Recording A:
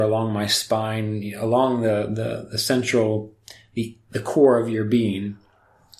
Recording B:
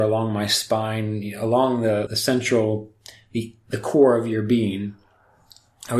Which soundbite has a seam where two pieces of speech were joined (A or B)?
B